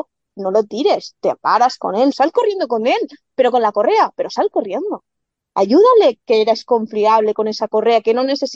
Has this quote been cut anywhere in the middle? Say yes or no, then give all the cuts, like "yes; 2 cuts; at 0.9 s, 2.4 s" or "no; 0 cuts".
yes; 1 cut; at 2.1 s